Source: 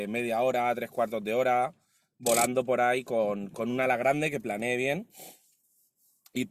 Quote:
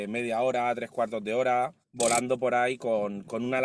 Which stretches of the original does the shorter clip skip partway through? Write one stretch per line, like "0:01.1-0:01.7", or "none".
0:01.8-0:02.1